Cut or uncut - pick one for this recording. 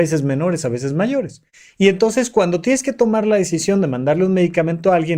uncut